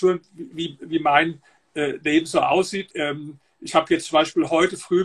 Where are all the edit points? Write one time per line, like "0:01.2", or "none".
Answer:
0:02.9